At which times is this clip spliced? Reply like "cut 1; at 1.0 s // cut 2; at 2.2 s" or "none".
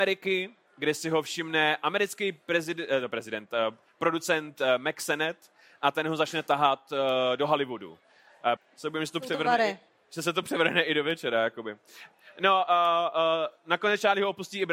cut 1; at 8.6 s